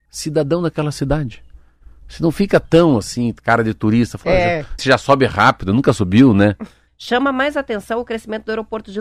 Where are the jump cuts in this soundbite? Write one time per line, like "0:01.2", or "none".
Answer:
0:04.8
0:06.9